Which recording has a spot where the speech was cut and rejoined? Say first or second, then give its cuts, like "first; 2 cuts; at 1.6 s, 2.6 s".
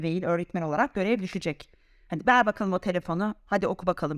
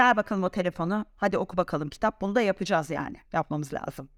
second; 1 cut; at 3.2 s